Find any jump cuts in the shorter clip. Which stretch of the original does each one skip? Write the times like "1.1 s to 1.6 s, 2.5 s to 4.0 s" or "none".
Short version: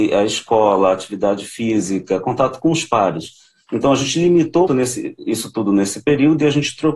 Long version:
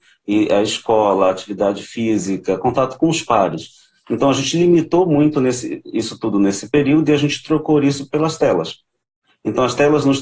5.0 s to 5.3 s

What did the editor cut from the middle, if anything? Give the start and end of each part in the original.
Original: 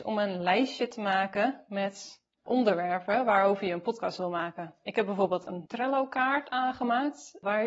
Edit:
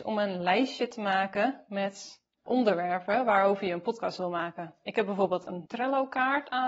none

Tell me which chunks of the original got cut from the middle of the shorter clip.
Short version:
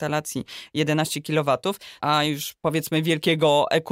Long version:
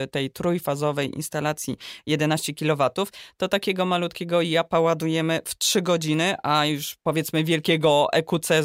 3.3 s to 6.4 s

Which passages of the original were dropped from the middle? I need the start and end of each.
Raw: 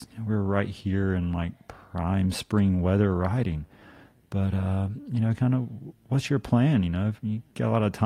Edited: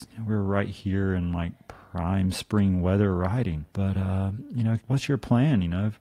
3.7 s to 4.2 s, 5.3 s to 6.0 s

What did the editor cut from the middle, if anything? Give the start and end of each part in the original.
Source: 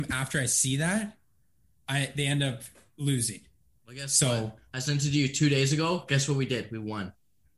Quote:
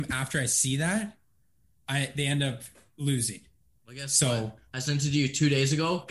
none

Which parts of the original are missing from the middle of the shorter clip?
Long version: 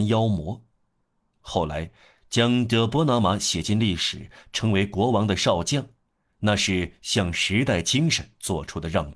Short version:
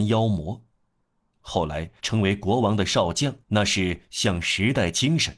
2.0 s to 4.5 s, 5.9 s to 6.3 s

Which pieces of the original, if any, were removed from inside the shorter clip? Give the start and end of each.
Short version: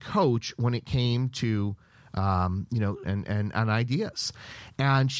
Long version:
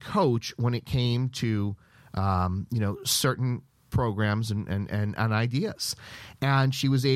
3.0 s to 4.7 s

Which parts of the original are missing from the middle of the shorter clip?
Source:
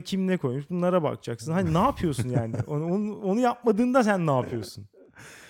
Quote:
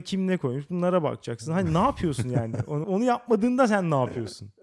2.8 s to 3.2 s

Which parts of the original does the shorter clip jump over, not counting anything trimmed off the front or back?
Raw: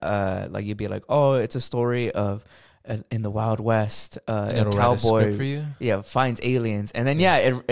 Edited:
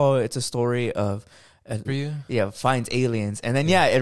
3.0 s to 5.4 s

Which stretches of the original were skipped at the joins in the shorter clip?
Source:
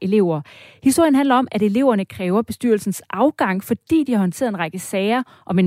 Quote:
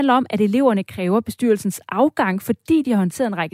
none

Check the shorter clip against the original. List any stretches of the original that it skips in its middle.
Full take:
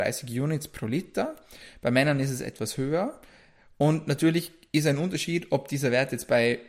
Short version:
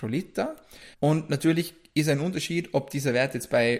1.7 s to 3.7 s

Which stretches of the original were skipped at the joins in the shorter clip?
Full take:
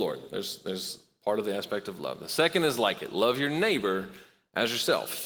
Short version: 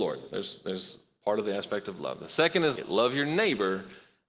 2.8 s to 3.0 s

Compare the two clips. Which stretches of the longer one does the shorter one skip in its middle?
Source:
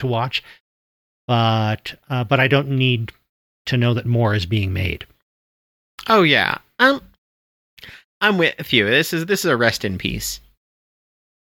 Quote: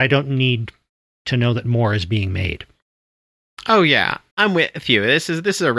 6.7 s to 8.1 s

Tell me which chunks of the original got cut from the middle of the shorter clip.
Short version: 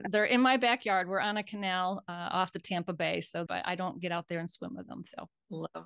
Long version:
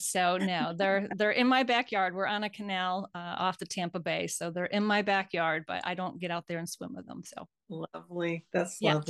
4.5 s to 5.7 s

